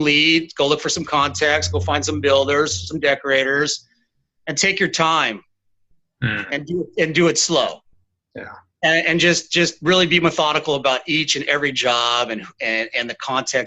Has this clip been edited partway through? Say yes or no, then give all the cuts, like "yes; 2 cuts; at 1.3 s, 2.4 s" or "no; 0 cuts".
no; 0 cuts